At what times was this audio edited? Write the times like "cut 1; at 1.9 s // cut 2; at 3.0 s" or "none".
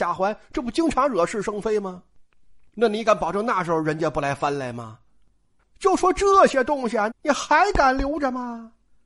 cut 1; at 5.6 s // cut 2; at 7.1 s